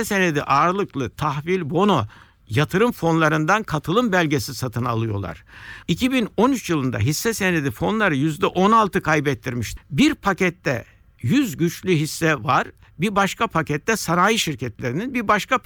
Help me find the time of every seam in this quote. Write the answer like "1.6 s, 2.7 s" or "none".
5.8 s, 9.8 s